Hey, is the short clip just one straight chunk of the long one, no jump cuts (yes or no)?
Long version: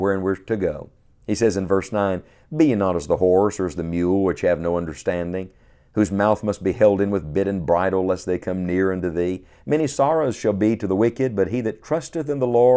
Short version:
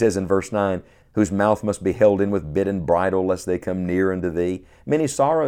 no